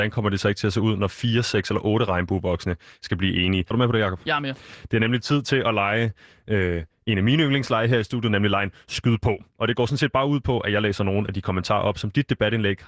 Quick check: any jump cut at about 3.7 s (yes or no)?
yes